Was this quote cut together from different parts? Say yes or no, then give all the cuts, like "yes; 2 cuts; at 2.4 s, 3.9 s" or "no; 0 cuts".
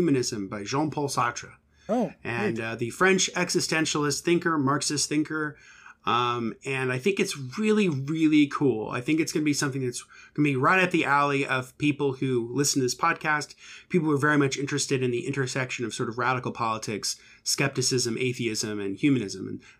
no; 0 cuts